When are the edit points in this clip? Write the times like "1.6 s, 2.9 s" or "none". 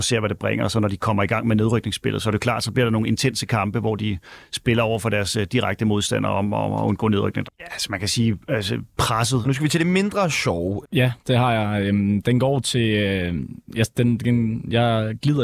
7.4 s, 9.4 s, 10.8 s